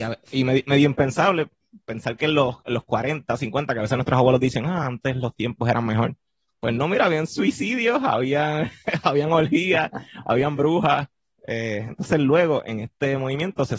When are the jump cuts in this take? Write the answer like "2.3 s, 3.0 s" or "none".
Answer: none